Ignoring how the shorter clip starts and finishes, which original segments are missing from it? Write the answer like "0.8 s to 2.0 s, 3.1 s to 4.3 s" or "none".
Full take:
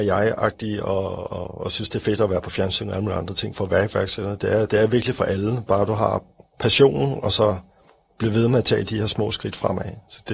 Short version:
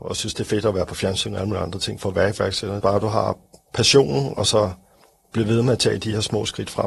4.4 s to 5.7 s